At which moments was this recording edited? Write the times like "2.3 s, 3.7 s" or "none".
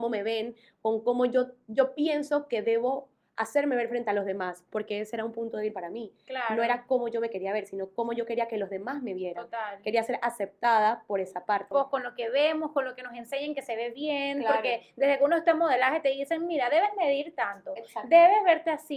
11.7 s